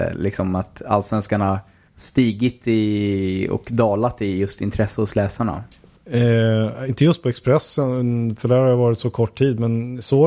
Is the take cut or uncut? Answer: uncut